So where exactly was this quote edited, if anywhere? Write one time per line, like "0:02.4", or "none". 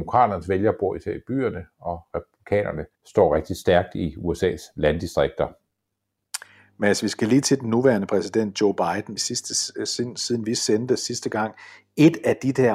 0:02.9
0:09.2